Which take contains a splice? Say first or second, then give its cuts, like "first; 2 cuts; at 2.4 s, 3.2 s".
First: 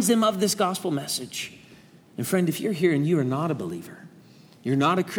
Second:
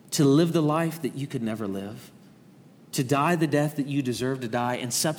first; 1 cut; at 2.0 s